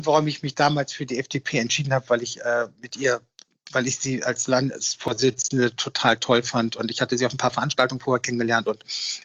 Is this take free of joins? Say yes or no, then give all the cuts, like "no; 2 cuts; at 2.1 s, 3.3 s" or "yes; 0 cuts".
yes; 0 cuts